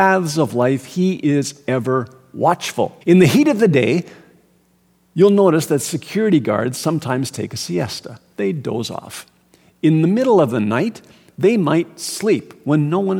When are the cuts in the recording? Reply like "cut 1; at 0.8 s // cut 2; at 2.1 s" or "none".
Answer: cut 1; at 3.0 s